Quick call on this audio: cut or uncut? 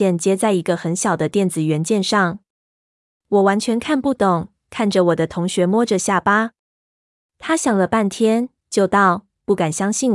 uncut